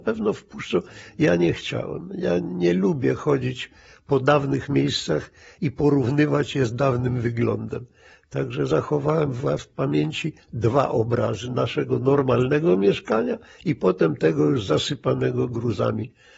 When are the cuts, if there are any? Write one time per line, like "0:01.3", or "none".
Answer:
0:09.6